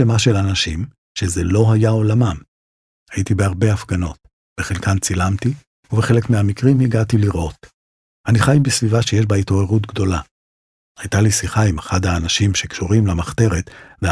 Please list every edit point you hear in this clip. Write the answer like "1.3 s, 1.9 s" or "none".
2.9 s